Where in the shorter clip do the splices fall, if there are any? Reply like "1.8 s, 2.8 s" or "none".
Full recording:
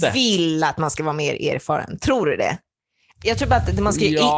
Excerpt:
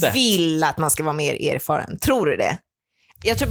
none